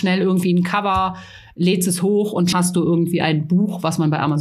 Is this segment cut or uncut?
cut